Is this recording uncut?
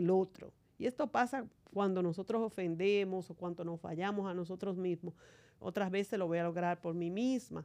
no; 1 cut; at 5.6 s

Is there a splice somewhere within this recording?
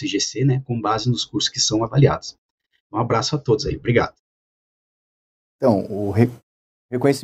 yes; 1 cut; at 2.8 s

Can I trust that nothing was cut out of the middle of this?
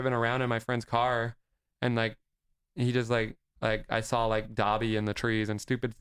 yes; 0 cuts

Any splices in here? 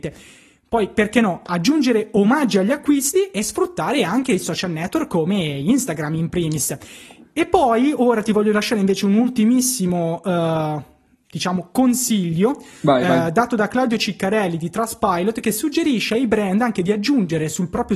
no; 0 cuts

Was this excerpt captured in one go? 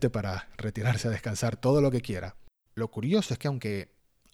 no; 1 cut; at 2.7 s

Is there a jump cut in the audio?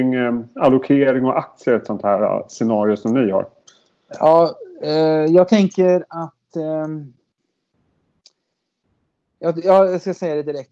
no; 0 cuts

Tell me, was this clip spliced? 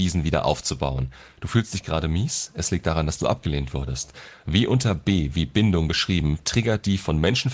no; 0 cuts

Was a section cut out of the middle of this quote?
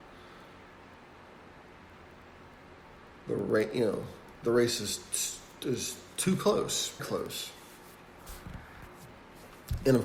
yes; 1 cut; at 7.0 s

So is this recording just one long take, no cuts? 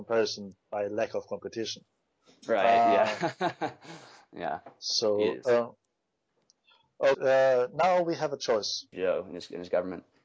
no; 2 cuts; at 7.1 s, 8.9 s

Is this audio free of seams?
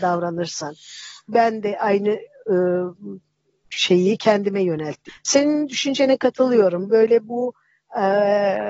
no; 2 cuts; at 1.3 s, 5.1 s

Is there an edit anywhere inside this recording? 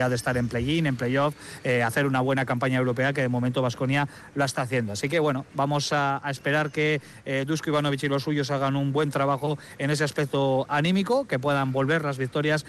no; 0 cuts

